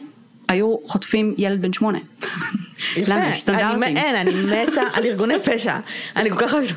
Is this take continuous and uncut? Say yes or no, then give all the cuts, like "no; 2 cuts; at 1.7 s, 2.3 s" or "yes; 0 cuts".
yes; 0 cuts